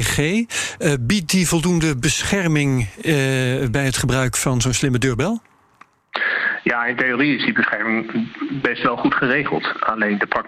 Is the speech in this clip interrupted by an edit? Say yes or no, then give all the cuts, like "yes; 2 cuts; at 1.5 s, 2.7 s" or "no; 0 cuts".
no; 0 cuts